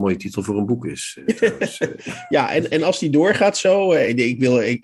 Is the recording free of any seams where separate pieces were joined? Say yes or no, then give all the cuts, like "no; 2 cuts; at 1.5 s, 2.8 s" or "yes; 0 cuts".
yes; 0 cuts